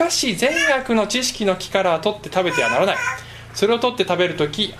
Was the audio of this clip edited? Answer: no; 0 cuts

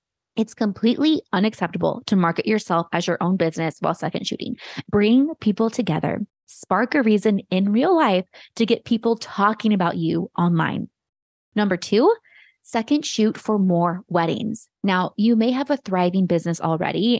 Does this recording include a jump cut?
yes; 1 cut; at 4.8 s

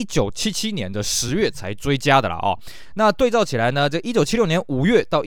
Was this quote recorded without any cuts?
yes; 0 cuts

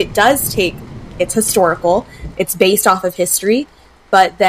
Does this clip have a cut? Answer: yes; 1 cut; at 1.1 s

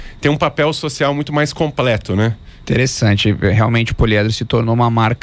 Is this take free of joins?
no; 1 cut; at 2.6 s

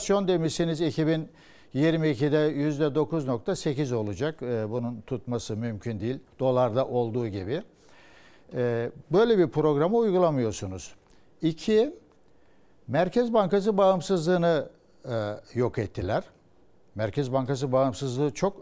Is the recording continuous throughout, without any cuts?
yes; 0 cuts

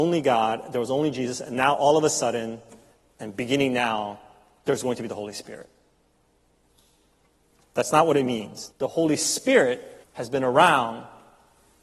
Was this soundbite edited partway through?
yes; 2 cuts; at 8.7 s, 10.0 s

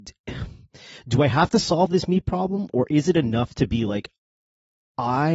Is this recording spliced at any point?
no; 0 cuts

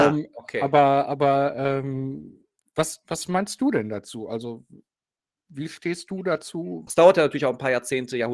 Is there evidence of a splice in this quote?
yes; 1 cut; at 6.9 s

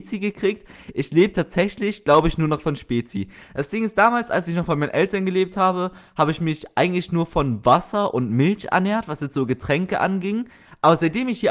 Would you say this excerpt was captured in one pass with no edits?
yes; 0 cuts

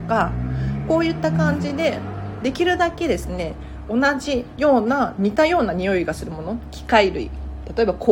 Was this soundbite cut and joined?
no; 0 cuts

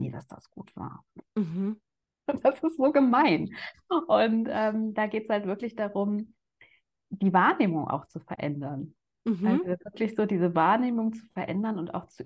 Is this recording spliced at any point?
no; 0 cuts

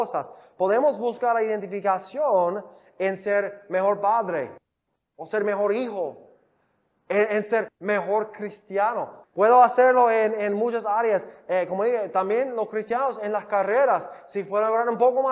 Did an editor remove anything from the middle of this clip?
yes; 1 cut; at 9.2 s

